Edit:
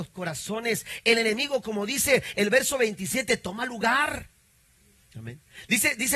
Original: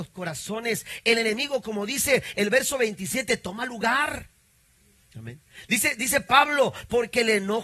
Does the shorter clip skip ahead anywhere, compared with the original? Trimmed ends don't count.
no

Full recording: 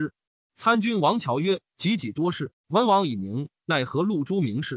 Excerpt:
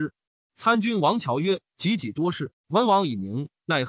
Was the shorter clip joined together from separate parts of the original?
no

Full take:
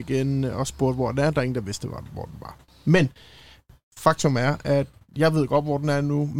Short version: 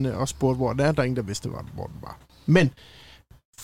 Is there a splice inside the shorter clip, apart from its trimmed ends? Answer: no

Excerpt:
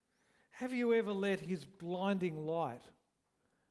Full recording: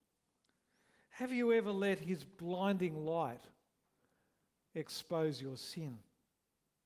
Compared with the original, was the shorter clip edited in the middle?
no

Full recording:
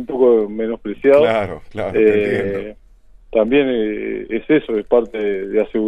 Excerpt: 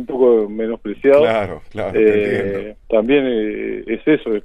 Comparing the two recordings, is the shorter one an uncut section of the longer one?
no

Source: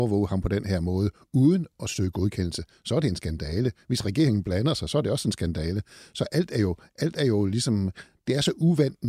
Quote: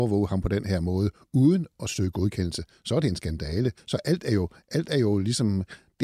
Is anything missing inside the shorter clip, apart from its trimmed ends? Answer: yes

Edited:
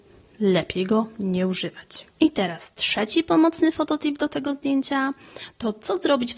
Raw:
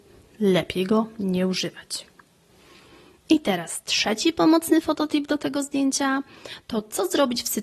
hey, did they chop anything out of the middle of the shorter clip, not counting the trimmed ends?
yes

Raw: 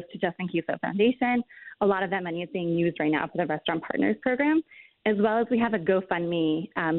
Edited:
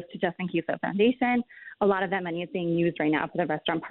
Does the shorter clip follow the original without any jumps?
yes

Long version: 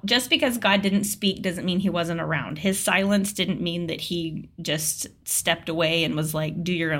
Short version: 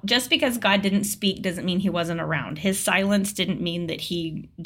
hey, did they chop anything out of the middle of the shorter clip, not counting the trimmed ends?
no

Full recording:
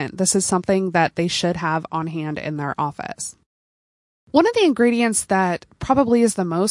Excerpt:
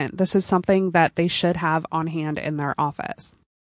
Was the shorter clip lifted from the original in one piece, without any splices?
yes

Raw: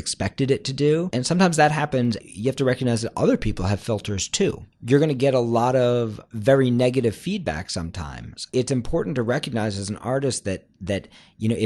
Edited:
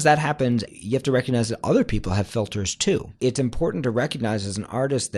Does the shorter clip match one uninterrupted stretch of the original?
no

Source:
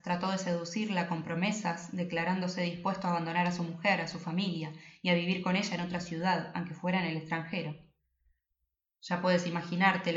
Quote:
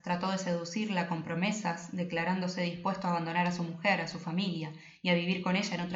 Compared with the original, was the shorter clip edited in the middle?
no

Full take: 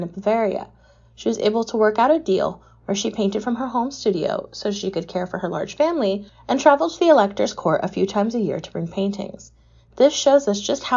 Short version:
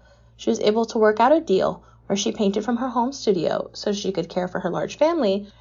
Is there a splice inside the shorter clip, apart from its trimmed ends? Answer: no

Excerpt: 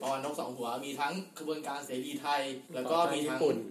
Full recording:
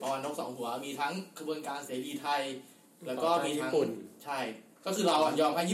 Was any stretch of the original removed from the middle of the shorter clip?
yes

